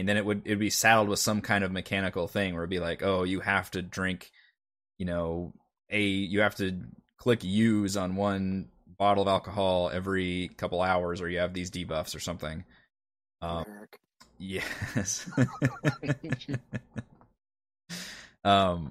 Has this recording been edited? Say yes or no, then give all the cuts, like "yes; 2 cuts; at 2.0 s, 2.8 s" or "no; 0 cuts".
yes; 1 cut; at 13.6 s